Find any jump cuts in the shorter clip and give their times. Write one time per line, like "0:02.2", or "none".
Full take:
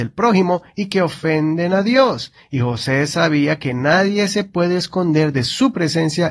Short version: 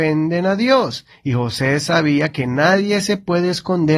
none